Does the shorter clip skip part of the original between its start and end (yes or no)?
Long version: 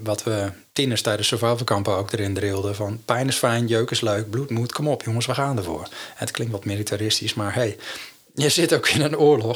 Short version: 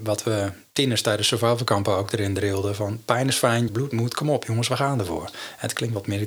yes